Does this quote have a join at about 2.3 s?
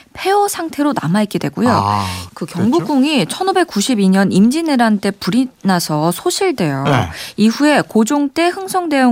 yes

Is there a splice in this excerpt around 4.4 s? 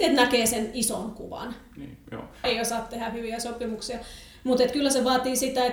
no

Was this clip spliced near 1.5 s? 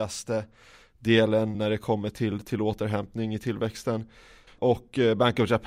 yes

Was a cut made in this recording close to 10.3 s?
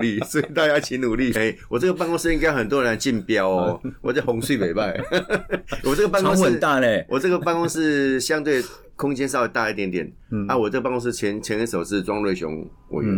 no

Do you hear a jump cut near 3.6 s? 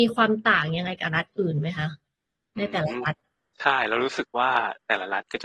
no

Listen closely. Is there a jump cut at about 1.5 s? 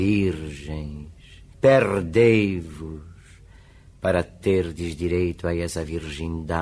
yes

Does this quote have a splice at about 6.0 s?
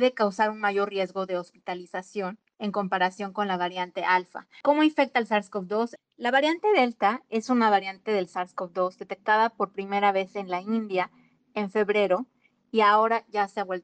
yes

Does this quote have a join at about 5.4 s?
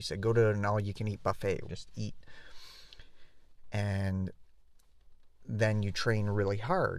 no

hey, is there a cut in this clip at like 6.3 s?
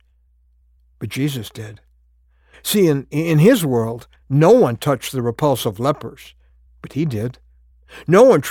no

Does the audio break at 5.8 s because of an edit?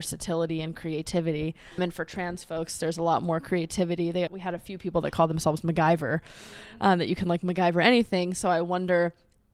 no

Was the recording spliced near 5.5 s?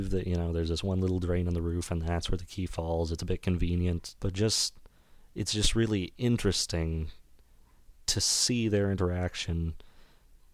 no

